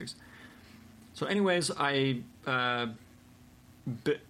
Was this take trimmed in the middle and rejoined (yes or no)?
no